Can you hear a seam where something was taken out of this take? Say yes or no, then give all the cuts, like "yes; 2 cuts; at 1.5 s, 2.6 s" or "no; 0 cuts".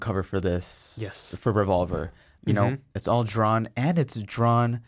yes; 1 cut; at 2.4 s